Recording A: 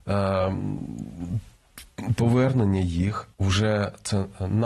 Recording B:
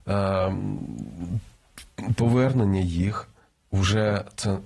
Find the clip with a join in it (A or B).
A